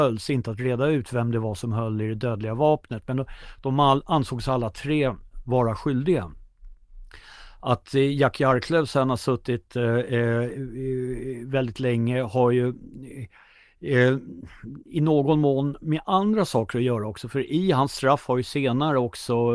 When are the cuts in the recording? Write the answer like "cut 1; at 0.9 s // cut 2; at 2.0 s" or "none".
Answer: none